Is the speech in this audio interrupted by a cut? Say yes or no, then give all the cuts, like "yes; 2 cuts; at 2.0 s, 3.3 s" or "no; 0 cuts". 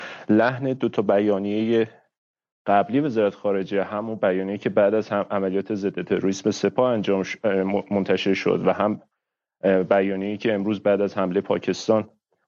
no; 0 cuts